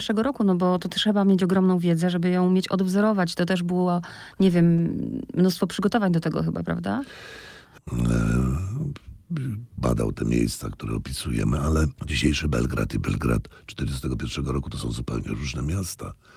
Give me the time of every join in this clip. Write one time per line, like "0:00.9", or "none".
0:07.8
0:09.8
0:12.0